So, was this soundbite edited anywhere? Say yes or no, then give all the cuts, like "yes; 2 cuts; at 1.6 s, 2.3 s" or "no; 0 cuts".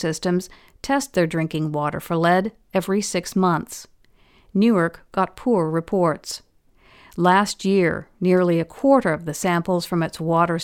no; 0 cuts